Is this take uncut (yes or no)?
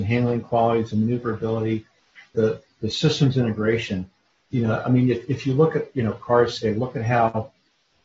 no